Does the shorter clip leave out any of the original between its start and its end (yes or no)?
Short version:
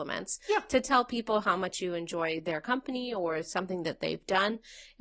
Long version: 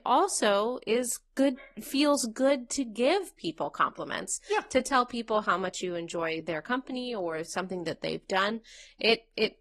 no